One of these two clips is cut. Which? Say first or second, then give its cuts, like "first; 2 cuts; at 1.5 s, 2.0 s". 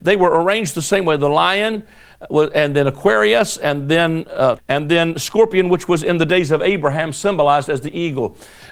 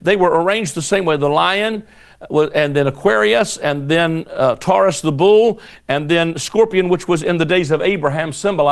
first; 1 cut; at 4.6 s